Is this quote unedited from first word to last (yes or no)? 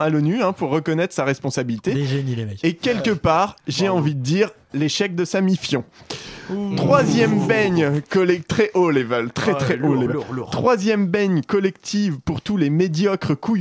yes